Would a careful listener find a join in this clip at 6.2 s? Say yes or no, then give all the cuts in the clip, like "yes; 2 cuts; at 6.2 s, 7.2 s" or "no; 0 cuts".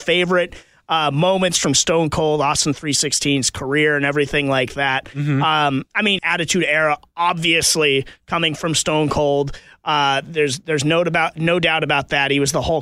yes; 1 cut; at 6.2 s